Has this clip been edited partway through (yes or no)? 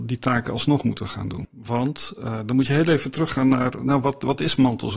yes